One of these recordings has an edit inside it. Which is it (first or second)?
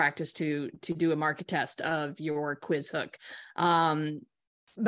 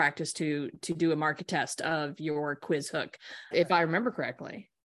second